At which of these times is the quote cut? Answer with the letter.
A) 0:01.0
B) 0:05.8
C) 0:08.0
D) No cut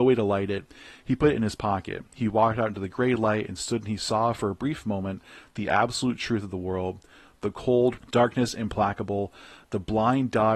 C